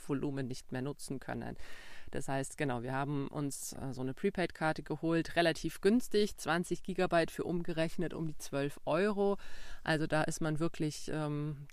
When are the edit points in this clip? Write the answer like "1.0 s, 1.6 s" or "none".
none